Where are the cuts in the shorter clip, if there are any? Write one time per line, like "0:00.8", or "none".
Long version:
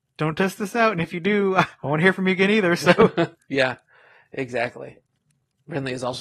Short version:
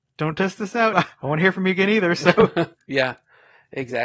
0:00.9